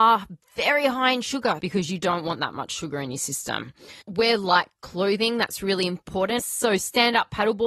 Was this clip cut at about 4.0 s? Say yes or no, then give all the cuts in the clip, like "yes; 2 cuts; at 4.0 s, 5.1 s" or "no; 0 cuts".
yes; 3 cuts; at 1.6 s, 4.0 s, 6.4 s